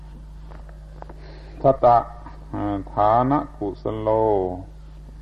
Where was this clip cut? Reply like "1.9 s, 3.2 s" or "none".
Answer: 1.8 s